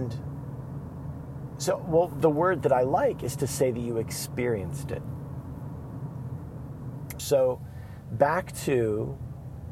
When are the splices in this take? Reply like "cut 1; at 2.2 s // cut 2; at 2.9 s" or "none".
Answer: cut 1; at 7.2 s